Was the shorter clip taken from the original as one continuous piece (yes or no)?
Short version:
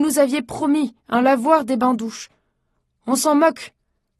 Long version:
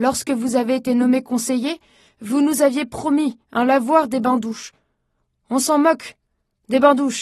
yes